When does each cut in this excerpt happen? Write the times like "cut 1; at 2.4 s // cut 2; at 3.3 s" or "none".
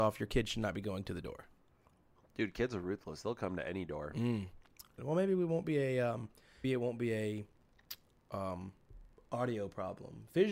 cut 1; at 5.0 s // cut 2; at 6.6 s